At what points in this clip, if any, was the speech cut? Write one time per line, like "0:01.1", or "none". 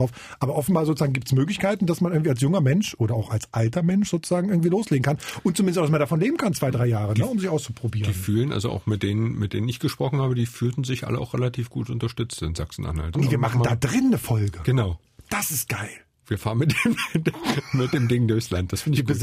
0:13.1